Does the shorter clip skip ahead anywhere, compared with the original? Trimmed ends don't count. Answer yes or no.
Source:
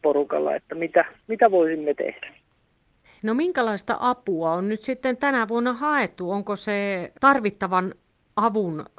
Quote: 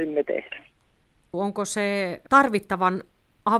yes